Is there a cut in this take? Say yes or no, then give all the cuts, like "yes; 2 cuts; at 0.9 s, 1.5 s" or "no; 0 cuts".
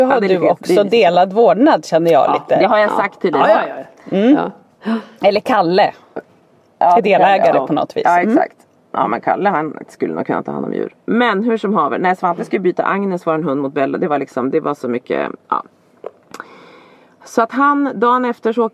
no; 0 cuts